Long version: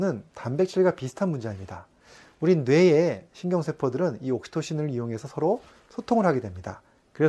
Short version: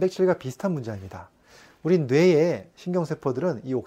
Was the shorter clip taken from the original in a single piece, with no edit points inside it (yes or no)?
yes